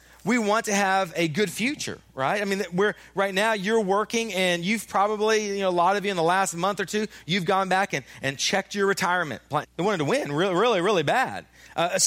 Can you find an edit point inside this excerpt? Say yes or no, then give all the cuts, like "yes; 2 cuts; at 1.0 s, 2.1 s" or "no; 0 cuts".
yes; 1 cut; at 9.6 s